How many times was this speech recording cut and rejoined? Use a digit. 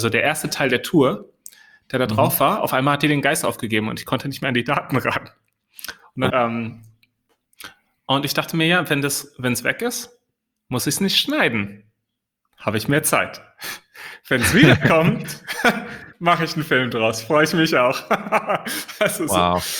1